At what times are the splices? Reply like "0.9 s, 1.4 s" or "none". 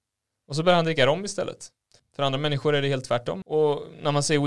2.0 s, 3.4 s